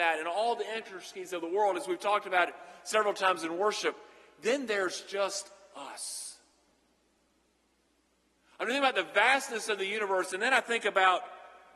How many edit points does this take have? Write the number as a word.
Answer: zero